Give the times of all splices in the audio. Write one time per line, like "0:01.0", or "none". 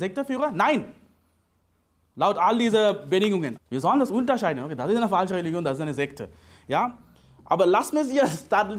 0:03.6